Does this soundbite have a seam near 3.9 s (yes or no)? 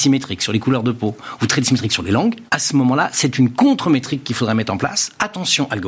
no